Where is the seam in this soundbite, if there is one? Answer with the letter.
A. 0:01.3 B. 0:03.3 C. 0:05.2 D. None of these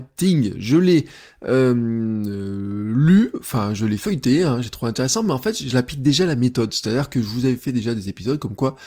D